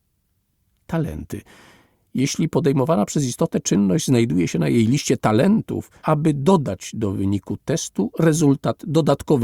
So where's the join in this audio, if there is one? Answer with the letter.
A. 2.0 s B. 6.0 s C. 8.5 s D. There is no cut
B